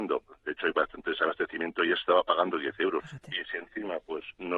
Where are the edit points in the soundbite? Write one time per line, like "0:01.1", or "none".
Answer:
0:03.0